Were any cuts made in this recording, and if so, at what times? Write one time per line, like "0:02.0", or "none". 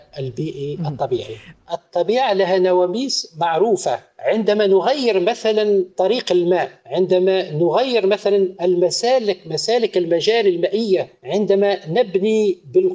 0:01.5